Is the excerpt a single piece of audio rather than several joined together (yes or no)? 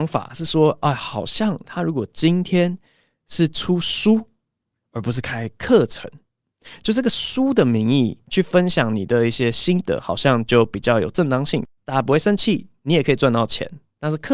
yes